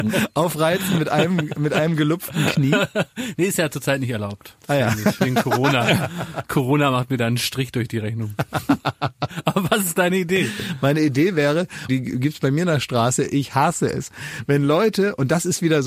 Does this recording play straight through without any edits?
no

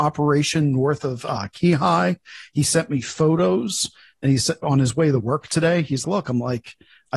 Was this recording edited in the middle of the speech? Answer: yes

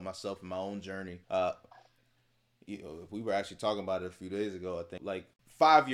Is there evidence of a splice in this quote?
yes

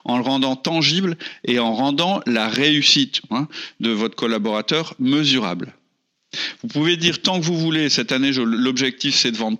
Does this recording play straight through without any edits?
no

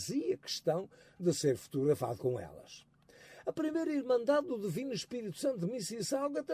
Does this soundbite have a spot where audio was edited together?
no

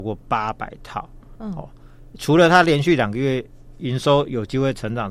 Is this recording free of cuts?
no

